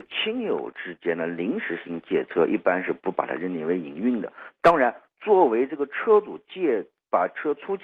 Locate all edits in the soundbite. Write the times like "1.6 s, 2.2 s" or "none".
none